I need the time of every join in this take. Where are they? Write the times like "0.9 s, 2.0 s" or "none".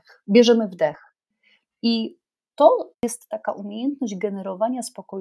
1.6 s, 2.9 s